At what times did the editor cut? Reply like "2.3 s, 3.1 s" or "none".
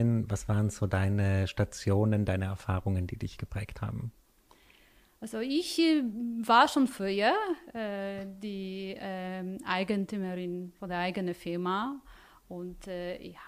none

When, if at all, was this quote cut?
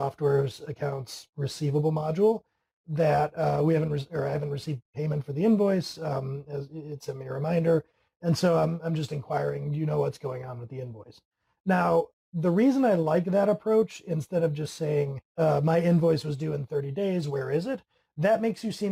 15.3 s

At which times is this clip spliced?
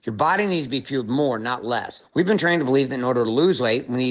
2.0 s

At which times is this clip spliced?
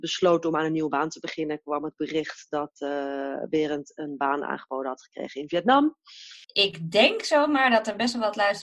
6.4 s

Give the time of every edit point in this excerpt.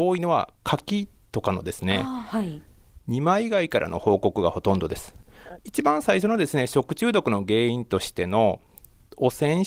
5.6 s

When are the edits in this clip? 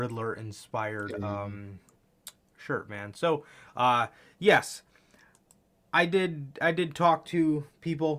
none

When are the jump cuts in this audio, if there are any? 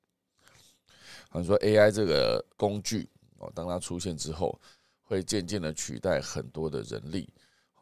none

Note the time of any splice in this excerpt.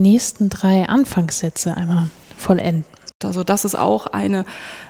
3.2 s

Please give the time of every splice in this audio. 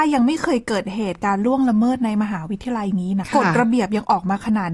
3.2 s

